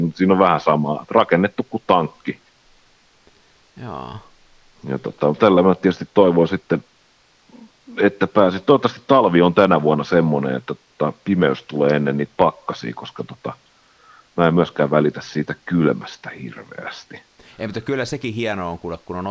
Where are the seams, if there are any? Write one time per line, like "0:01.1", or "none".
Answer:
0:05.4